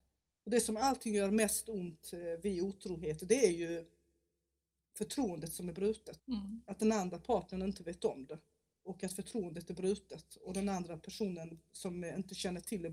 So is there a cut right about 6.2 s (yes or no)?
yes